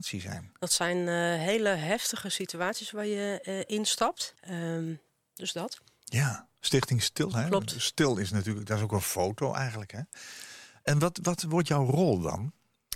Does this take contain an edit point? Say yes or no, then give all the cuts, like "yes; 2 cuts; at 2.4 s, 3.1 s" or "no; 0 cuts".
yes; 2 cuts; at 4.4 s, 7.3 s